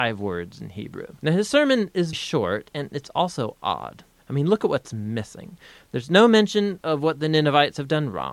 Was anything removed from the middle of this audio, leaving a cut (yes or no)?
yes